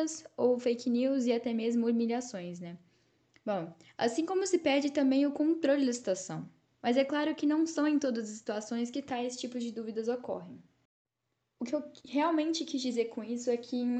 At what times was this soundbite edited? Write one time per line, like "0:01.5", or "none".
0:06.7